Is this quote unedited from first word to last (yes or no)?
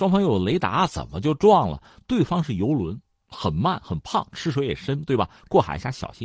yes